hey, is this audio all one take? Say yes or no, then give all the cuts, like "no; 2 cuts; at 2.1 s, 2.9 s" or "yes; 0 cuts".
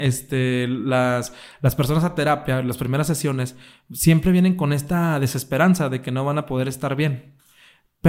yes; 0 cuts